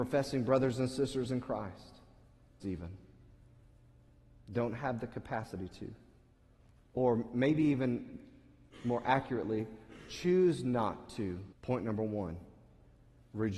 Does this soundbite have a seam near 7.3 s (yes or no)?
no